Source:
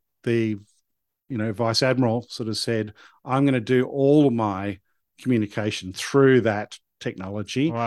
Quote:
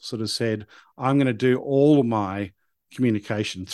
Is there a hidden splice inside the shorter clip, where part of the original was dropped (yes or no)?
no